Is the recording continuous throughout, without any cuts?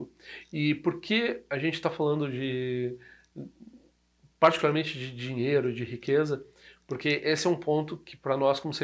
yes; 0 cuts

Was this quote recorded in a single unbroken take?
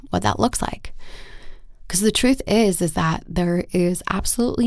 yes; 0 cuts

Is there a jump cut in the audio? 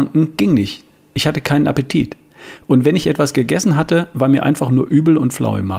no; 0 cuts

